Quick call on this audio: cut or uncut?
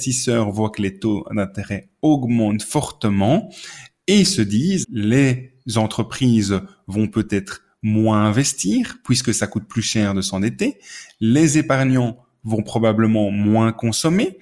cut